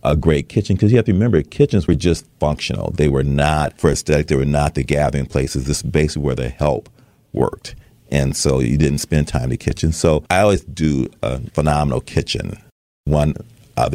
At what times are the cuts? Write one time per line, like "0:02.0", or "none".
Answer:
none